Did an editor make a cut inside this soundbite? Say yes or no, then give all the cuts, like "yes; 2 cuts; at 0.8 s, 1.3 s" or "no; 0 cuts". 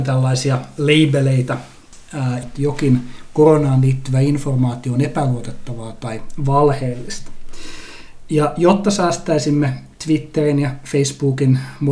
yes; 1 cut; at 2.4 s